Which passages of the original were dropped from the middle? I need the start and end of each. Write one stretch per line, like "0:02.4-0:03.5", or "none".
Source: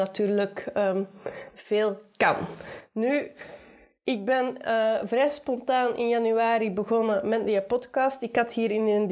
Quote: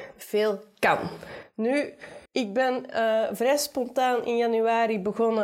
0:03.6-0:04.0